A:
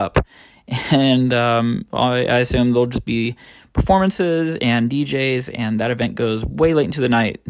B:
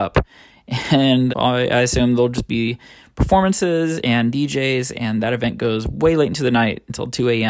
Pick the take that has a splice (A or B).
B